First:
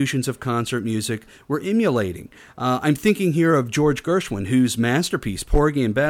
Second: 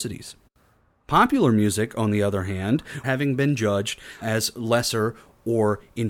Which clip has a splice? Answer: second; 2 cuts; at 3.0 s, 4.2 s

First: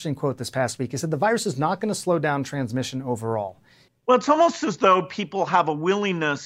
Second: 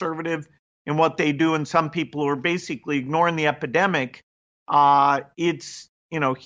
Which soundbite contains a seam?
first; 1 cut; at 3.9 s

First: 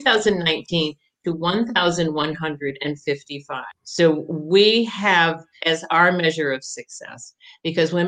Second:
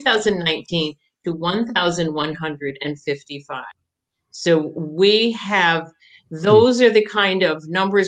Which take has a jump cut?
first; 2 cuts; at 3.8 s, 5.6 s

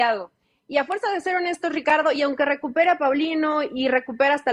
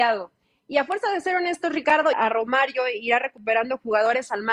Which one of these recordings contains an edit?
second; 1 cut; at 2.1 s

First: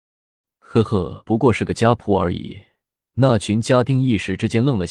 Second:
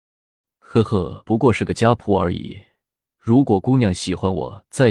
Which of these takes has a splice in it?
first; 1 cut; at 3.1 s

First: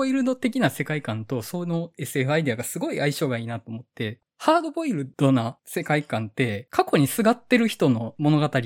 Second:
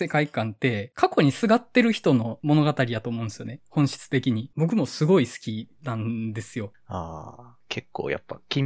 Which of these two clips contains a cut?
second; 1 cut; at 4.5 s

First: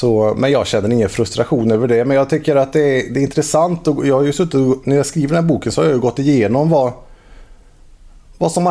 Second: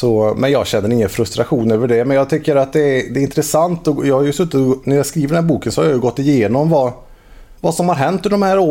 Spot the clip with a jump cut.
second; 1 cut; at 7.6 s

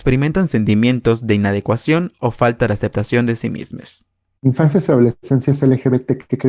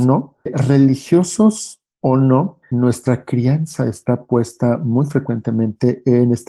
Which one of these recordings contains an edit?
second; 1 cut; at 2.6 s

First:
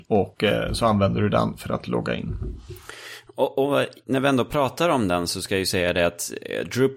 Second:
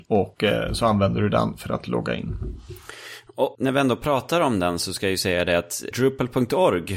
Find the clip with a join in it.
second; 2 cuts; at 3.5 s, 5.9 s

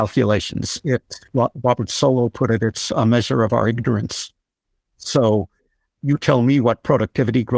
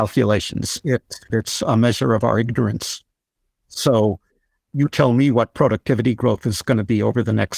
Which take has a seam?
second; 1 cut; at 1.3 s

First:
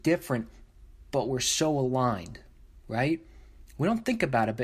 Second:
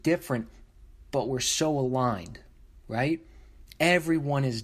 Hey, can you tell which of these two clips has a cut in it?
second; 1 cut; at 3.7 s

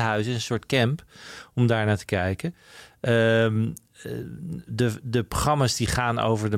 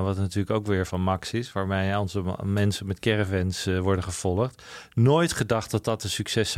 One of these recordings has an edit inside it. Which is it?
first; 1 cut; at 4.7 s

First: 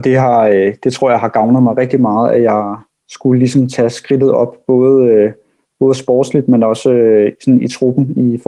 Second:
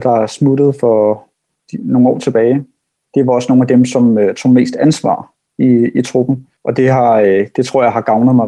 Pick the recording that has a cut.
second; 1 cut; at 6.6 s

